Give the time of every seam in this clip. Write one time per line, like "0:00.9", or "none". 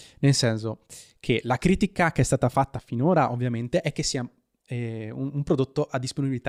none